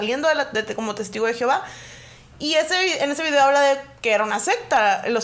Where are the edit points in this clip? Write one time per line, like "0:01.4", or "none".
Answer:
none